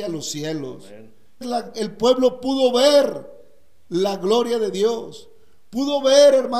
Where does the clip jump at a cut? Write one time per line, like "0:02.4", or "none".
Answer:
0:01.4